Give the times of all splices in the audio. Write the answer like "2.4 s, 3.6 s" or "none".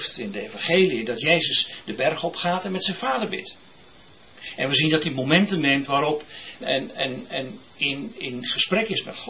6.6 s